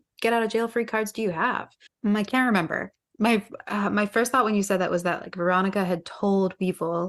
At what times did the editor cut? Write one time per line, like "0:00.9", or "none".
0:01.9